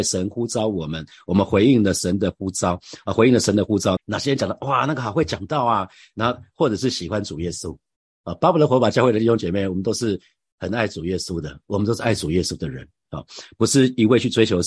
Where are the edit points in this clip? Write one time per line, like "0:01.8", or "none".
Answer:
0:04.0